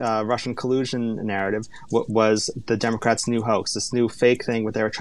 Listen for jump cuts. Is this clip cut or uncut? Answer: uncut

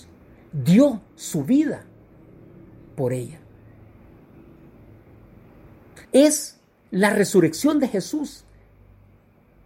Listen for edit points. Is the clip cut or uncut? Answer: cut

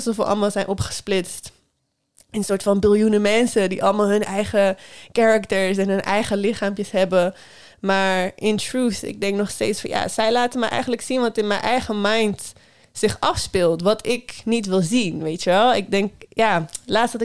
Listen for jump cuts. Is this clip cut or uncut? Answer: uncut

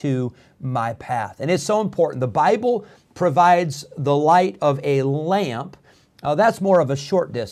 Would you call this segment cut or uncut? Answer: uncut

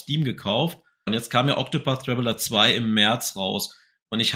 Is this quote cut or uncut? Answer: cut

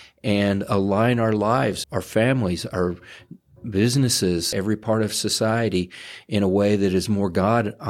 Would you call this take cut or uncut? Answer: cut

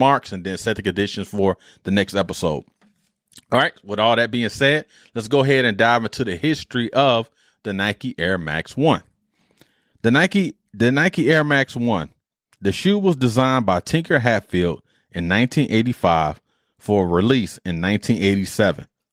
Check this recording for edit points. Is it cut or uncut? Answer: uncut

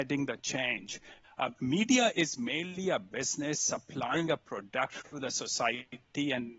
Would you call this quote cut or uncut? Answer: cut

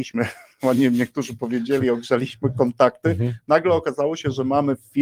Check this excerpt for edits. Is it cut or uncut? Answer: uncut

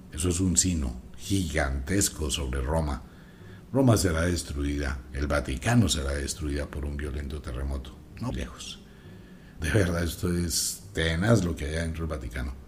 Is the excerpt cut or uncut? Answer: cut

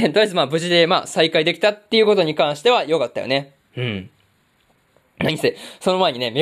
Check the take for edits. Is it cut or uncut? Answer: uncut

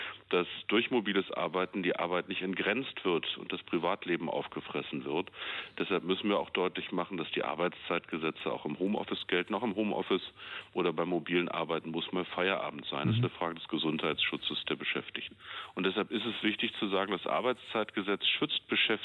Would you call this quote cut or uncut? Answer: uncut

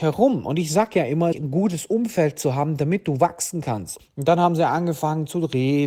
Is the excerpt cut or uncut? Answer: cut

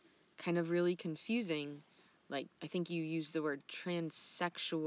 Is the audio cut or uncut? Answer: cut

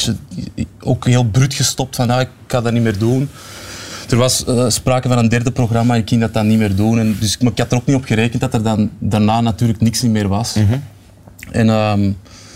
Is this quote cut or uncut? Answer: uncut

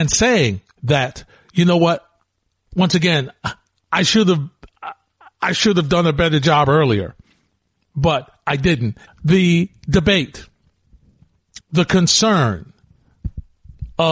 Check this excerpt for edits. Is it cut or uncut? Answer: cut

